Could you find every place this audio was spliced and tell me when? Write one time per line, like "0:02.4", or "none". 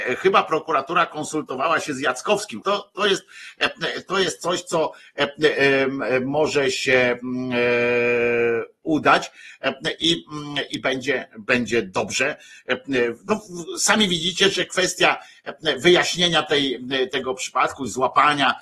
0:02.6